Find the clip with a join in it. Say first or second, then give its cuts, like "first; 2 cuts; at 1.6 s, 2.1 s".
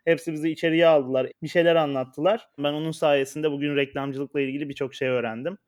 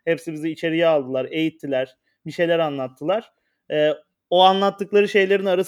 first; 2 cuts; at 1.3 s, 2.6 s